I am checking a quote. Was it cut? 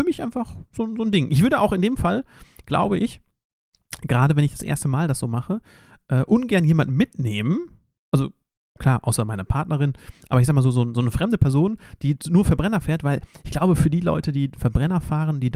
no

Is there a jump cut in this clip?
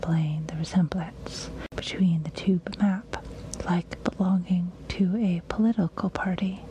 yes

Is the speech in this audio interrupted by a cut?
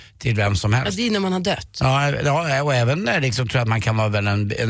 no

